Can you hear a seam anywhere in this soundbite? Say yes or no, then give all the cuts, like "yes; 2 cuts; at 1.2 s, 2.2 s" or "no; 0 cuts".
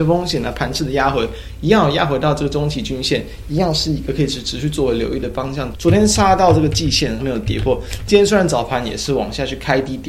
yes; 2 cuts; at 5.7 s, 7.2 s